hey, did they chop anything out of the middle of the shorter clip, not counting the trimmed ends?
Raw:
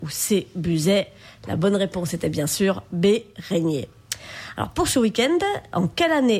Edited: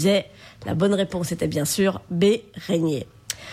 no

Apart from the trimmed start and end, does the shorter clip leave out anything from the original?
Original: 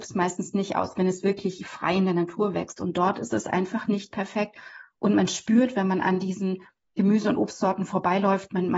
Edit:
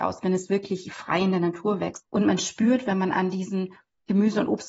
yes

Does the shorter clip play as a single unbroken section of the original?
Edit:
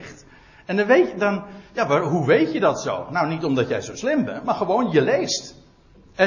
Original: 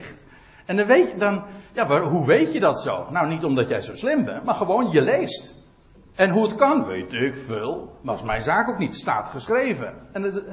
yes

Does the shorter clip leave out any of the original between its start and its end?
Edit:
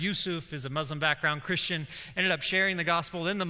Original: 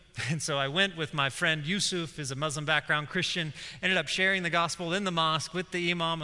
no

